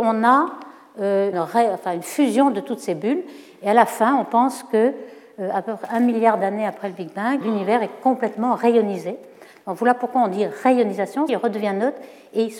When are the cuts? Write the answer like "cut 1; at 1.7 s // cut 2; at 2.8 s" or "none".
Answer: cut 1; at 1.3 s // cut 2; at 7.4 s // cut 3; at 11.3 s